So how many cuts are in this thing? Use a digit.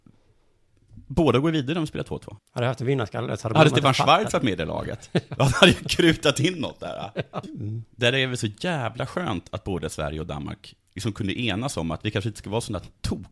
2